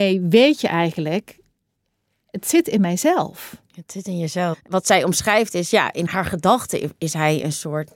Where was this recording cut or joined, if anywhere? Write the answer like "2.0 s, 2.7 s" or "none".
4.5 s